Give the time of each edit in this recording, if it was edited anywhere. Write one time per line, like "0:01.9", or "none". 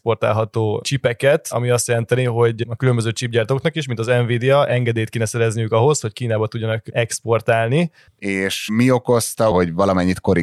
0:08.1
0:09.5